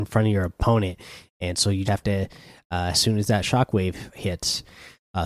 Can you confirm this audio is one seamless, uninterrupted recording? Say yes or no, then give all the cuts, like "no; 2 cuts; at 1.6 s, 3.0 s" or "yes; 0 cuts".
no; 2 cuts; at 1.9 s, 2.9 s